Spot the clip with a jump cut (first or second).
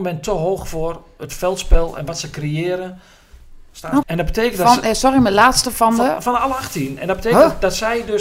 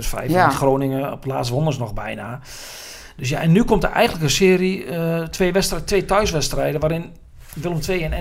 first